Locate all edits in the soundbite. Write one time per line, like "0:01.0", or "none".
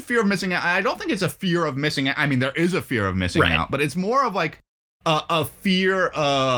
none